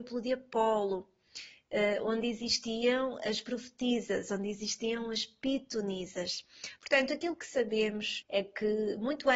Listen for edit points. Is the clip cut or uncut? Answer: cut